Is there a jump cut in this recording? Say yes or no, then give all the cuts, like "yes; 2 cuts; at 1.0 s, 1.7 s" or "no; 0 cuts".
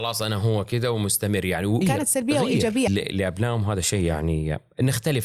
yes; 2 cuts; at 1.8 s, 2.9 s